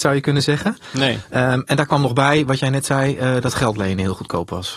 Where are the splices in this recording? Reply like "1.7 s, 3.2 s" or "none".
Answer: none